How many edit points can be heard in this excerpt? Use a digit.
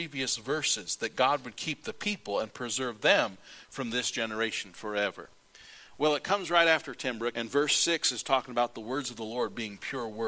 1